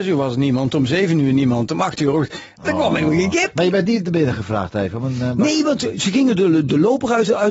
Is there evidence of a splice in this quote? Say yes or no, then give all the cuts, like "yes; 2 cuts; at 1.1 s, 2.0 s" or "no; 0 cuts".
no; 0 cuts